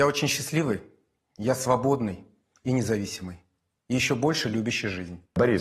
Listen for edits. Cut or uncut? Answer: uncut